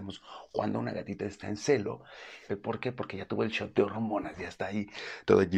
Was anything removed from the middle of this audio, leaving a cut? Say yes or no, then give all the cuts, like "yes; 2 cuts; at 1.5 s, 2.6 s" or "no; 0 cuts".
yes; 1 cut; at 2.5 s